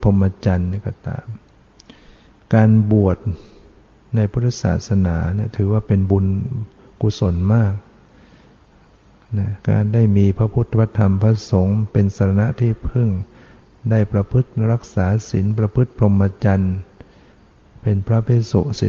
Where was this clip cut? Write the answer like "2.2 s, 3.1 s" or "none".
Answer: 9.6 s